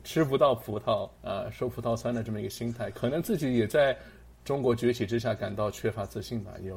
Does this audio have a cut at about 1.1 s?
yes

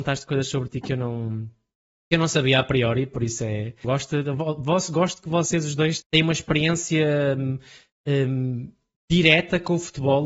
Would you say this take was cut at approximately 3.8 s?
yes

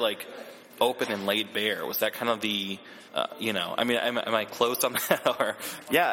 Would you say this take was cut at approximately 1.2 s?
no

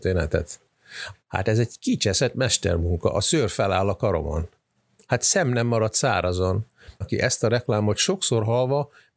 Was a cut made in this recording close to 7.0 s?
yes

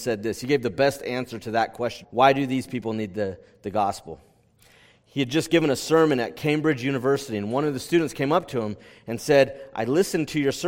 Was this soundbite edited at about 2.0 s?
yes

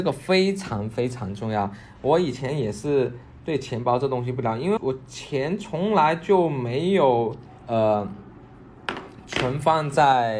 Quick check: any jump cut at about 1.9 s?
no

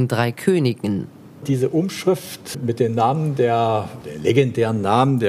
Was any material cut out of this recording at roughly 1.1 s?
no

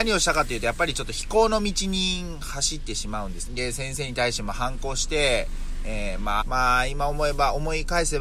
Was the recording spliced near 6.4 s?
yes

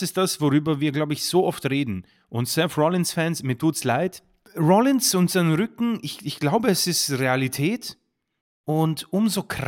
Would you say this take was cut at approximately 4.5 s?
yes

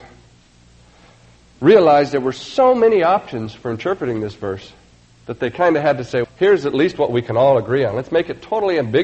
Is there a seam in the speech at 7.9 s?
no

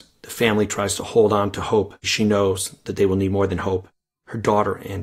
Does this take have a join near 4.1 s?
no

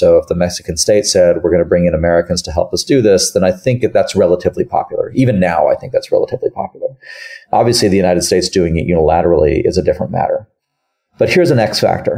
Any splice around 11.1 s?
no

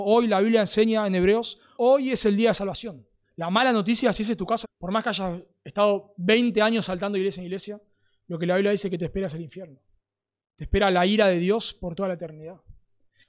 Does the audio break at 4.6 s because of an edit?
yes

